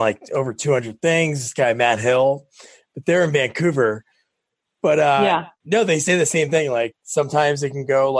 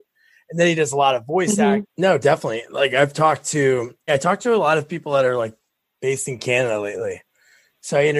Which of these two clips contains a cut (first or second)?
second